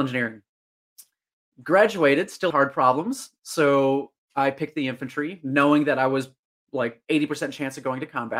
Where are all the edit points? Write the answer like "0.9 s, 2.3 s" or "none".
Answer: 2.5 s